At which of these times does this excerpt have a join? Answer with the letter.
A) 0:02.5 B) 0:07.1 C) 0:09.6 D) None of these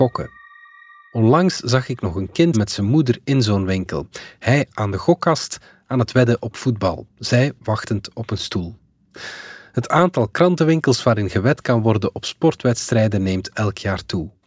A